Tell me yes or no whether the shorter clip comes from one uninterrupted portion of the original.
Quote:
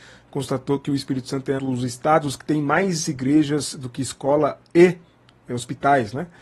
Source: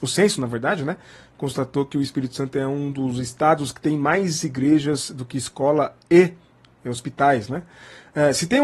no